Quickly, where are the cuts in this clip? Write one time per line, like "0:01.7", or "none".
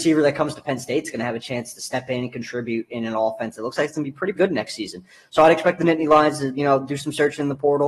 0:04.4